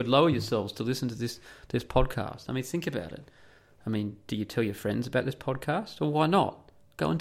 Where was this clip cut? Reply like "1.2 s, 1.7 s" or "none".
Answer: none